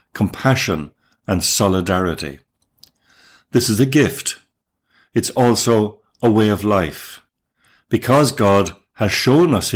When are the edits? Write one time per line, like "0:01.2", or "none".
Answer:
none